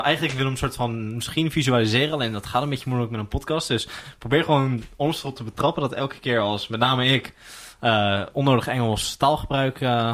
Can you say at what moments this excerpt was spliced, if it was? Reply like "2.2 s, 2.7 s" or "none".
none